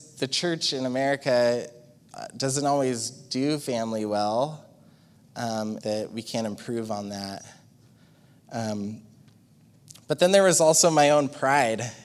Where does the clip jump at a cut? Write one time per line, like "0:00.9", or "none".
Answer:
0:05.8